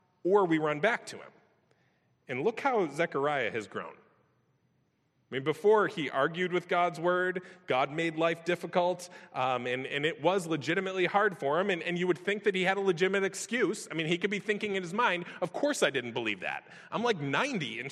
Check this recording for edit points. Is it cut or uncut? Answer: uncut